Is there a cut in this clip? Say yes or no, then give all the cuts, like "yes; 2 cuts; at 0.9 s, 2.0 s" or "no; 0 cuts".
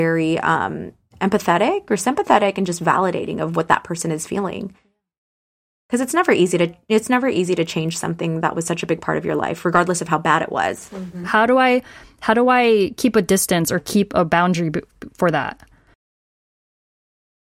no; 0 cuts